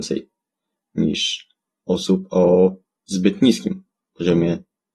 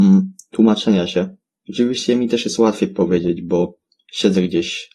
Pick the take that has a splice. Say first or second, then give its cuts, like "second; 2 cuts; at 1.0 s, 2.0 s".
second; 1 cut; at 1.6 s